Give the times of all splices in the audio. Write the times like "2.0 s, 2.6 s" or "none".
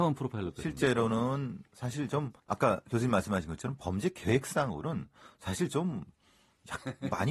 2.4 s